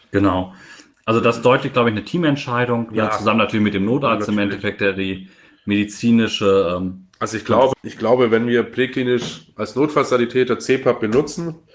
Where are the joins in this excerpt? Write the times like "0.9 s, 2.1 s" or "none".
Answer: 7.7 s